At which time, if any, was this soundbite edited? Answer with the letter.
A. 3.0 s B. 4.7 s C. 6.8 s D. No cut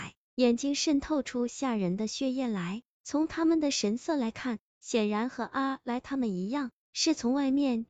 A